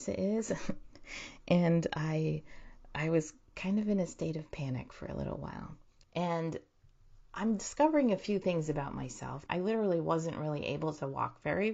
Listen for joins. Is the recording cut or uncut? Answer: cut